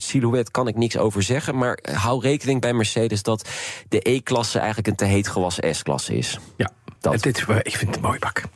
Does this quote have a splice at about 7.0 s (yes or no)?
yes